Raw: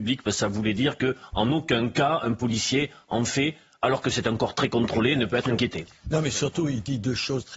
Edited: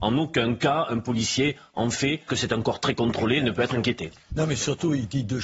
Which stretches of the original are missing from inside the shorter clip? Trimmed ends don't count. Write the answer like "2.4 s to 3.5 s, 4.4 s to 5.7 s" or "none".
3.6 s to 4.0 s